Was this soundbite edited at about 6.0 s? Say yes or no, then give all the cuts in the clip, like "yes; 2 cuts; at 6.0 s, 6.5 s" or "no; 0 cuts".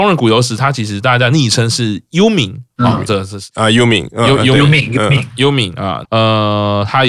yes; 1 cut; at 6.0 s